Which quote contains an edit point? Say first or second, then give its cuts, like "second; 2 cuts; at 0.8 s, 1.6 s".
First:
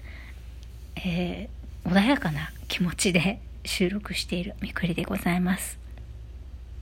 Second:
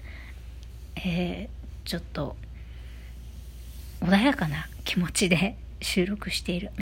first; 1 cut; at 1.8 s